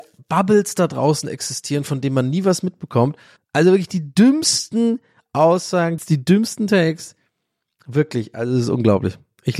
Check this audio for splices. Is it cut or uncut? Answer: cut